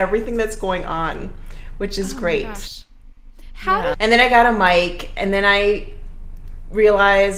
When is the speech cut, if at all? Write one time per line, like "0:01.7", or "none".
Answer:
0:03.9

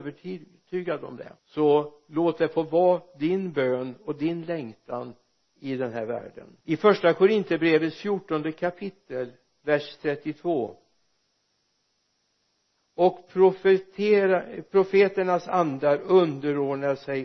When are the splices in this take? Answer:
0:01.4
0:06.6

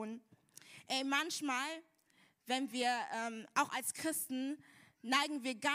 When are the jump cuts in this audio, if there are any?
none

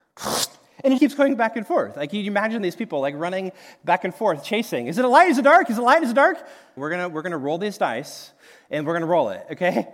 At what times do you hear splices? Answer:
0:01.0
0:06.8

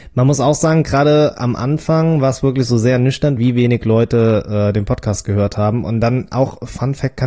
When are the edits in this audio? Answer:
0:03.4

